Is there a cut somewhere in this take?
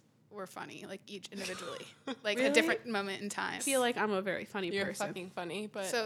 yes; 1 cut; at 3.6 s

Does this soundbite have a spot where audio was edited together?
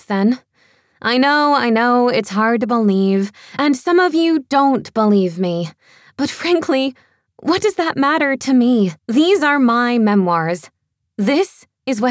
yes; 1 cut; at 9.0 s

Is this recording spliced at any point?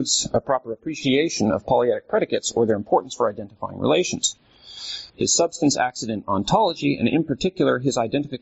yes; 1 cut; at 5.1 s

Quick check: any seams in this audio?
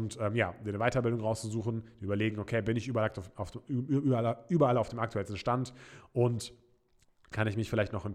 no; 0 cuts

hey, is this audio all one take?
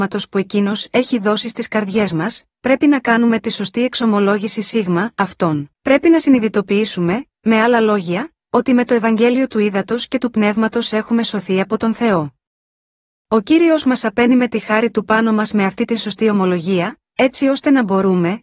no; 1 cut; at 5.7 s

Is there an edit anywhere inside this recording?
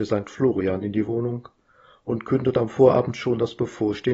no; 0 cuts

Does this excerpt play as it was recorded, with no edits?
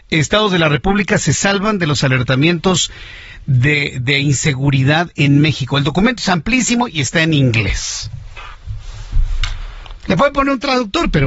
yes; 0 cuts

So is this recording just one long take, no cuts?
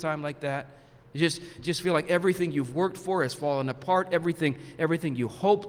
yes; 0 cuts

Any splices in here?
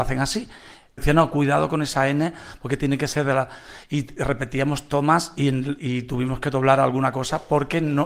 yes; 1 cut; at 1.0 s

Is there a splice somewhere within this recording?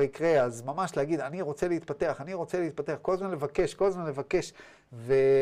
no; 0 cuts

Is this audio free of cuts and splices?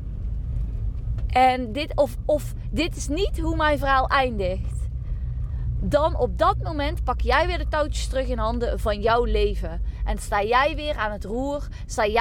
yes; 0 cuts

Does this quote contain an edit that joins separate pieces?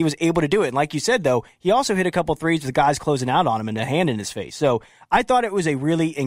no; 0 cuts

